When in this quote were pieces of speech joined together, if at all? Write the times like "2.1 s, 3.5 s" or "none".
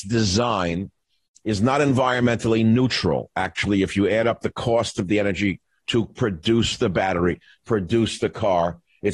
none